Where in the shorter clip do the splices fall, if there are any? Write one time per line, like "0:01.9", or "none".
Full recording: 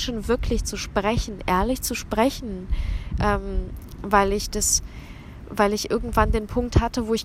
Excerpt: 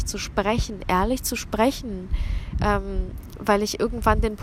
0:03.4

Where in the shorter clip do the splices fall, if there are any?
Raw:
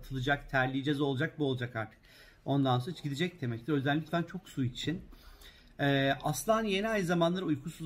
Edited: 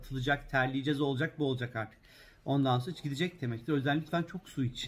none

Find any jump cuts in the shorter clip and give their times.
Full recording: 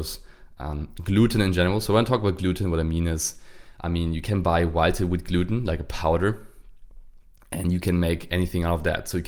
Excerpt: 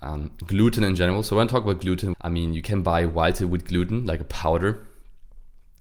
0:02.1

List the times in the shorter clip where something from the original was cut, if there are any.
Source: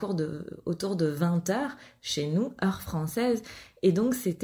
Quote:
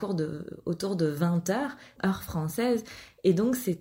0:02.0

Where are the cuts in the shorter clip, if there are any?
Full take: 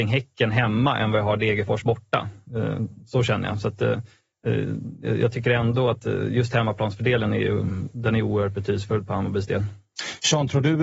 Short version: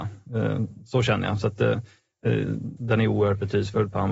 0:02.8

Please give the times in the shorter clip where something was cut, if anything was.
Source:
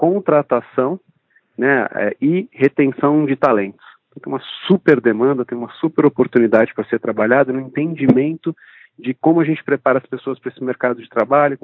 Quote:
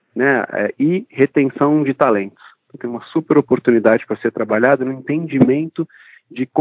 0:02.8

